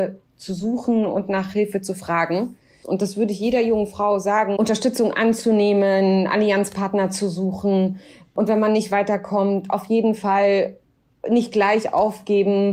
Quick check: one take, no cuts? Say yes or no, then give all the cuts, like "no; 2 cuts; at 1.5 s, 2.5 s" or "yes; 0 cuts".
no; 2 cuts; at 2.8 s, 4.6 s